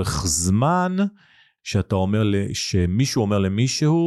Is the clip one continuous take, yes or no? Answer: no